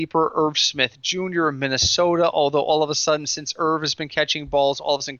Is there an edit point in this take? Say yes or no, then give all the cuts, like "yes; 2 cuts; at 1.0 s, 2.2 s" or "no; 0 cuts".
no; 0 cuts